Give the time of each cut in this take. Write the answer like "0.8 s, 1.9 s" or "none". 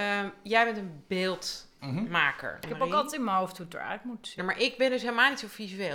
2.6 s, 4.4 s